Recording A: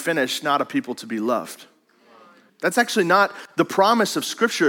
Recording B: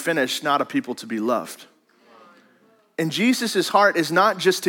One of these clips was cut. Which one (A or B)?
A